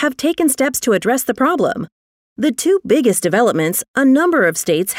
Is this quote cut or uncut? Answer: cut